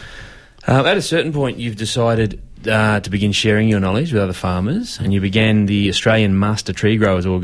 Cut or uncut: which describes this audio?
uncut